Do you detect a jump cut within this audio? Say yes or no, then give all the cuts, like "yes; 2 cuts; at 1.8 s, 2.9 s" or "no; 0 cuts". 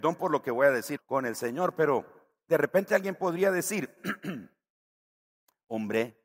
yes; 1 cut; at 1.0 s